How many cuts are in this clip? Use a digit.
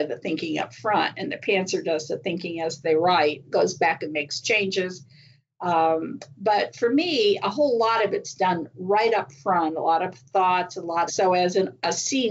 1